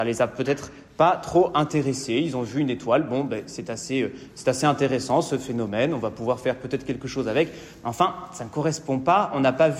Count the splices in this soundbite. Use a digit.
0